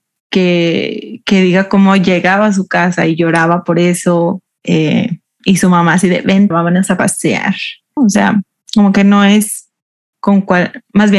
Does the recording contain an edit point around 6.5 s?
yes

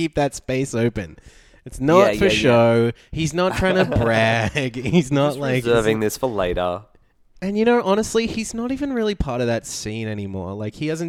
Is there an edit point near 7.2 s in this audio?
no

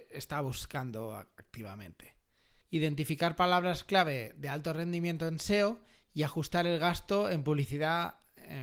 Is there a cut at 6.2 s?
no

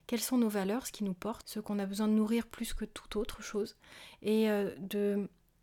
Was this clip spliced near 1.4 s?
yes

